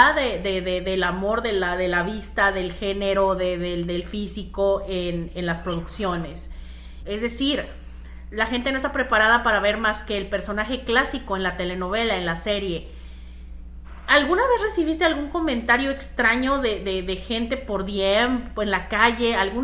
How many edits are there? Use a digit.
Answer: 1